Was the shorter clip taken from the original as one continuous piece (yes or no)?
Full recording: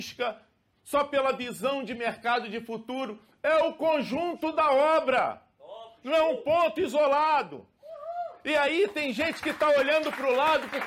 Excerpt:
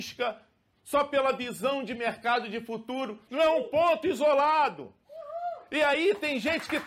no